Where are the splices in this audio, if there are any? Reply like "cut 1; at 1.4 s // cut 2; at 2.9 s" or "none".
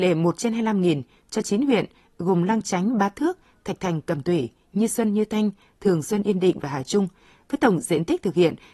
none

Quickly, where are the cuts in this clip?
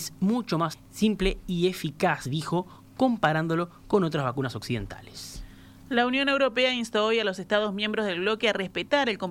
none

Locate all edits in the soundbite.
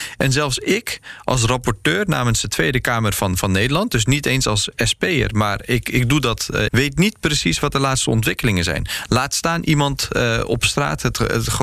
cut 1; at 6.7 s

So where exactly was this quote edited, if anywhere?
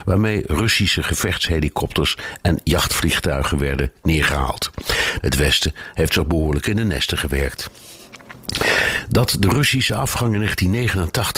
cut 1; at 5.2 s

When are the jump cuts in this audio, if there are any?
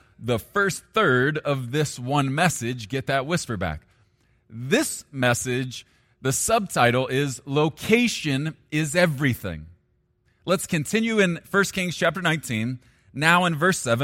cut 1; at 10.3 s

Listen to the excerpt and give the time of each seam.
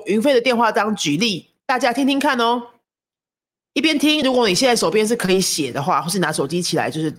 none

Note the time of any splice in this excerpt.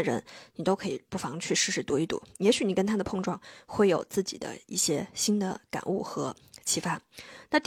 none

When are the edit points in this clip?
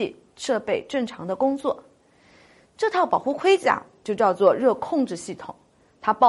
none

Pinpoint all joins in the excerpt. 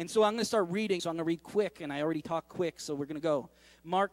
cut 1; at 1.0 s

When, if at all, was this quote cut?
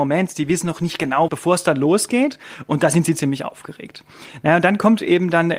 cut 1; at 1.3 s

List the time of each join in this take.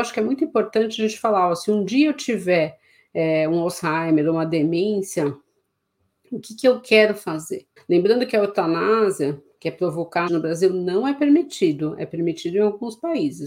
cut 1; at 7.8 s // cut 2; at 10.3 s

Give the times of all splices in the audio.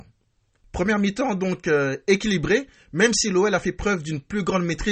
none

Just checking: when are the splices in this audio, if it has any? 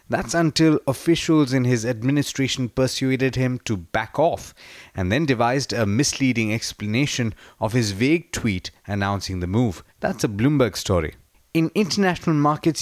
cut 1; at 9.9 s

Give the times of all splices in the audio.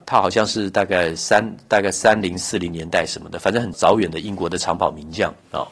cut 1; at 3.7 s

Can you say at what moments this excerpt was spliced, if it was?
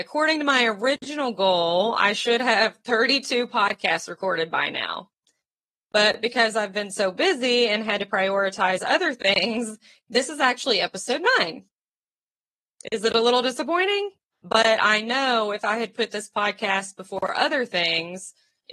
cut 1; at 14.3 s

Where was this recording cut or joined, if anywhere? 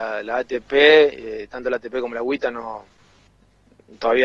none

